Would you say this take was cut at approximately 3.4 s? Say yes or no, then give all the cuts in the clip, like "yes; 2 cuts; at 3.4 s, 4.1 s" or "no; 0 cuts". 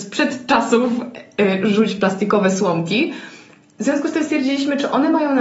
no; 0 cuts